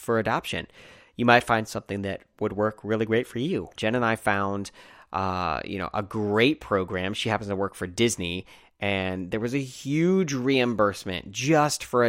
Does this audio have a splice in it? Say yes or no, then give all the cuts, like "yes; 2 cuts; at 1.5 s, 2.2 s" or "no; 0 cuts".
yes; 1 cut; at 3.8 s